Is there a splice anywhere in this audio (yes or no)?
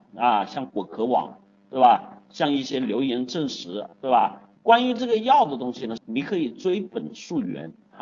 yes